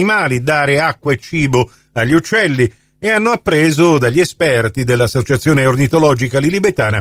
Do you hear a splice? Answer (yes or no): no